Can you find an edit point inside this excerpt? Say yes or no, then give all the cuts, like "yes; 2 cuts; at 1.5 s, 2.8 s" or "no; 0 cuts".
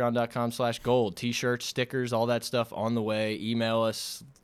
no; 0 cuts